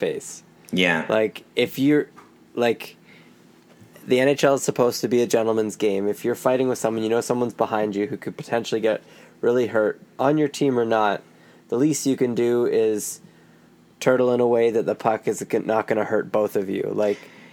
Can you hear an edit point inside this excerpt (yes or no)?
no